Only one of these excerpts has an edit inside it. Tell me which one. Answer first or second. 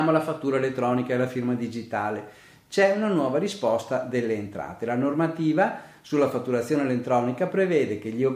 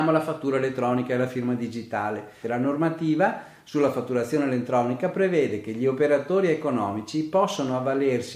second